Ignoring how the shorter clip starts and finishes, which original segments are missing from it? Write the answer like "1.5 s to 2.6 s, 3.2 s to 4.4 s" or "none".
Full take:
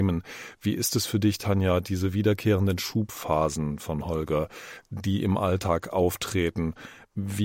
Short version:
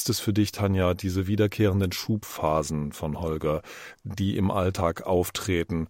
none